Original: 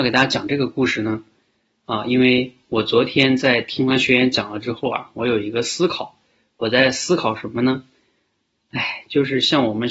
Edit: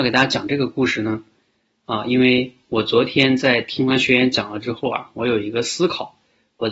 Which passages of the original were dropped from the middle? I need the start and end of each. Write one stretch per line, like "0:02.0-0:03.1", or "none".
none